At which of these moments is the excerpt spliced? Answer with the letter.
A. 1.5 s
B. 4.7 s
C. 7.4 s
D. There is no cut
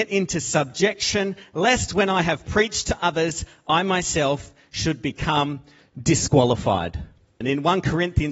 C